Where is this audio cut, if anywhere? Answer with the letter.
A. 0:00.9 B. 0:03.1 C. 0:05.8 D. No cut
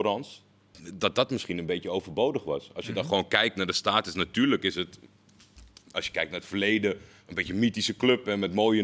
D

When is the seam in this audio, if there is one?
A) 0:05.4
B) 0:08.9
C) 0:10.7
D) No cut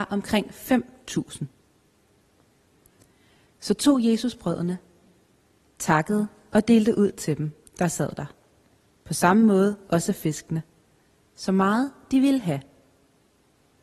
D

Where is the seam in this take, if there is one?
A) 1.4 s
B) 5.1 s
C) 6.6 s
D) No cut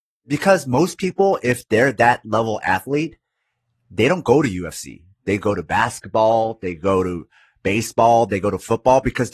D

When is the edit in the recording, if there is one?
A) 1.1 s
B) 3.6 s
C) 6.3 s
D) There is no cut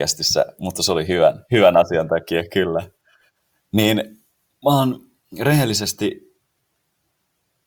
D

